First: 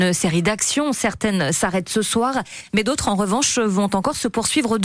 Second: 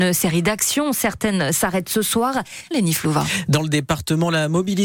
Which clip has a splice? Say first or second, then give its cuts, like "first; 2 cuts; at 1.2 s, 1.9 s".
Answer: second; 1 cut; at 2.7 s